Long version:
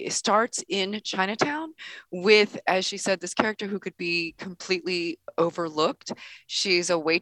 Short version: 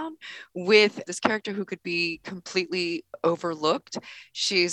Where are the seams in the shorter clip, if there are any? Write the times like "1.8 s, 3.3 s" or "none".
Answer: 1.0 s